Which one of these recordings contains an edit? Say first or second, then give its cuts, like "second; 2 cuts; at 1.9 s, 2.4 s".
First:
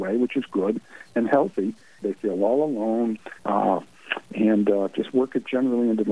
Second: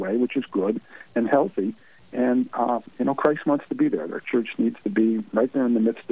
first; 2 cuts; at 2.0 s, 3.4 s